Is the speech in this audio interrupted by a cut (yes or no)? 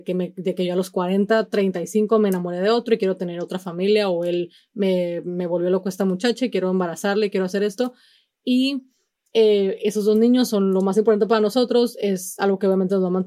yes